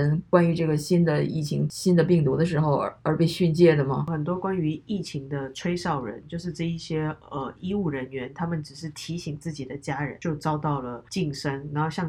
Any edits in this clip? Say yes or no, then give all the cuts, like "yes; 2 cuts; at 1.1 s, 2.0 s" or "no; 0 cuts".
no; 0 cuts